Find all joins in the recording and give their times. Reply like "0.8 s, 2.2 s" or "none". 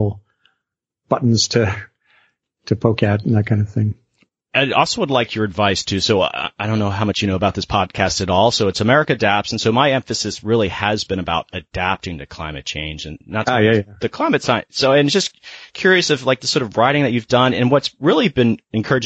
none